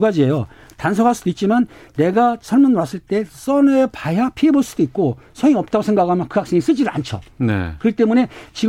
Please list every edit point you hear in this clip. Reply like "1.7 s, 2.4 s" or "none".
none